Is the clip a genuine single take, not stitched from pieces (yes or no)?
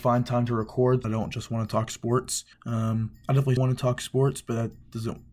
no